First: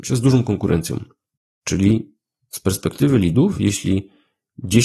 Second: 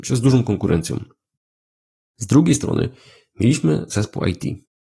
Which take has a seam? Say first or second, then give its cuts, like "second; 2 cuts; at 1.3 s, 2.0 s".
first; 1 cut; at 1.6 s